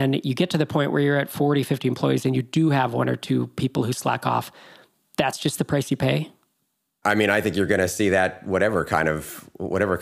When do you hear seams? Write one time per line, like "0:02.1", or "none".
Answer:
none